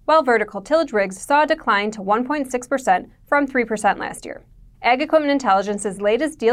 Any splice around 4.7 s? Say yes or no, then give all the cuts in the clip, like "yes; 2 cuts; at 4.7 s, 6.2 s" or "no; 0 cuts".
yes; 1 cut; at 4.7 s